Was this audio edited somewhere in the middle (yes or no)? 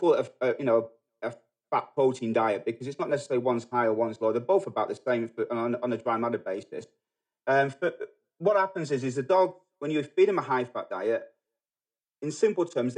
no